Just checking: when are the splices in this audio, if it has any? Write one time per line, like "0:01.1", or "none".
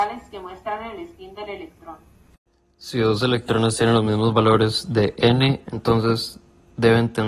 0:05.6